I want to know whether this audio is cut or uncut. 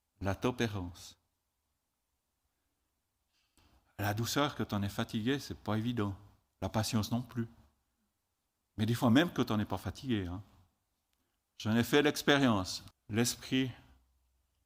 cut